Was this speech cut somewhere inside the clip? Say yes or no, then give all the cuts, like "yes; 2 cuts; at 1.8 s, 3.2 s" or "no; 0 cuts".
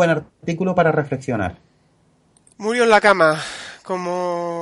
yes; 1 cut; at 2.5 s